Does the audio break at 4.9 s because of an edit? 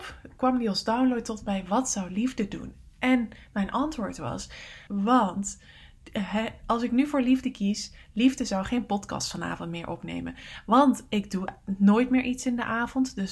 yes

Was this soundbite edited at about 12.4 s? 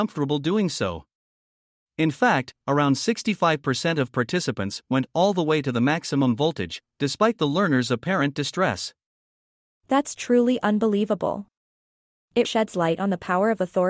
yes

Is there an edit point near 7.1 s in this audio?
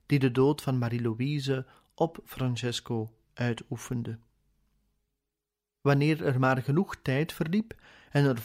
no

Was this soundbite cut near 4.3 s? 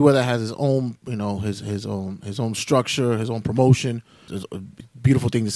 yes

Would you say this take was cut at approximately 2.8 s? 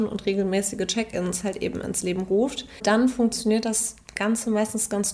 yes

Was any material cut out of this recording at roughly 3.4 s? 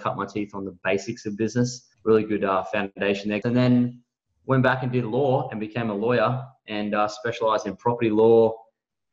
yes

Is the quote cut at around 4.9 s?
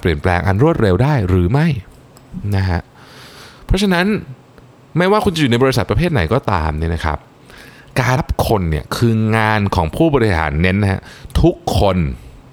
no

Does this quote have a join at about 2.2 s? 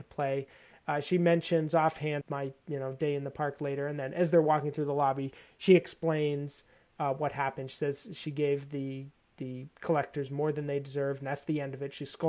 yes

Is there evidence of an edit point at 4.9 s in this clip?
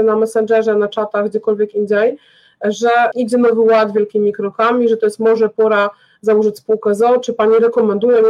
no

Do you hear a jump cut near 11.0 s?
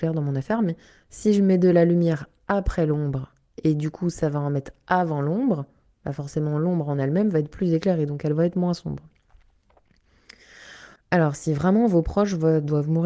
yes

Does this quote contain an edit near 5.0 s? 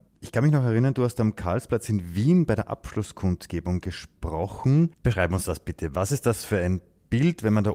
yes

